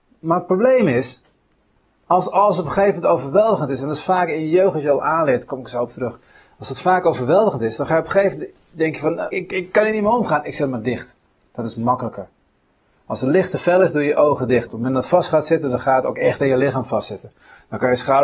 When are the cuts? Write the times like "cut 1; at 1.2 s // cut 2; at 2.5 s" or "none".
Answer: cut 1; at 9.3 s // cut 2; at 14.7 s